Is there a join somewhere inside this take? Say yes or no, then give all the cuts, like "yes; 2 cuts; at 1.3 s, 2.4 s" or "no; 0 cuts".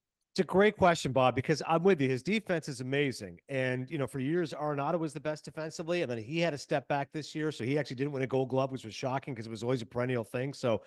no; 0 cuts